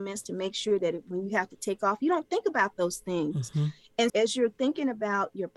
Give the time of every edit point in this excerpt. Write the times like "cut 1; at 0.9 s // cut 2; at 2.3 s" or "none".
cut 1; at 4.1 s